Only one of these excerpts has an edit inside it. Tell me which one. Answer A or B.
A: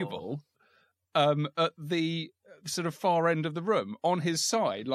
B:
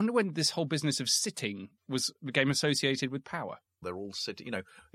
B